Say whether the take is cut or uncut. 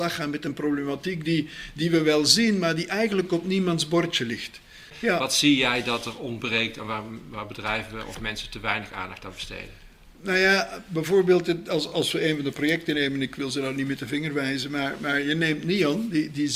uncut